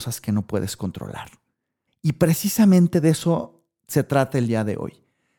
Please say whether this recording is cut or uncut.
cut